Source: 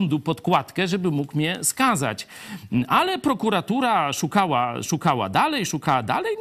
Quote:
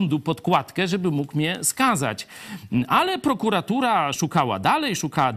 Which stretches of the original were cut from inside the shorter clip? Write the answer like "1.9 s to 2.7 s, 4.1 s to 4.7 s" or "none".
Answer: 4.1 s to 4.8 s